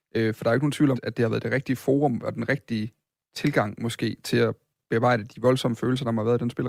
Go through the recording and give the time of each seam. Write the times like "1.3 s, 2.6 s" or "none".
0.9 s